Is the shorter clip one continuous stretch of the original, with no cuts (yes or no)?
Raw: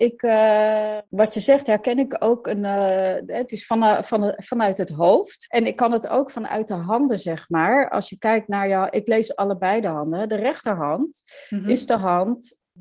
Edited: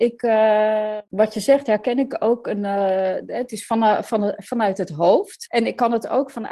yes